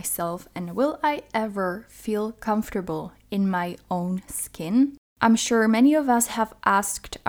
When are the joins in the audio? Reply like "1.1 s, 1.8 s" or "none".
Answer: none